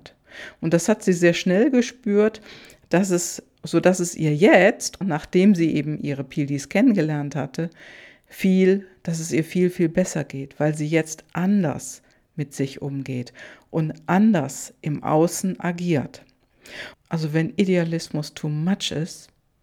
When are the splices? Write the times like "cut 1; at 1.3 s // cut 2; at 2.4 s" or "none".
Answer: cut 1; at 5.0 s // cut 2; at 16.9 s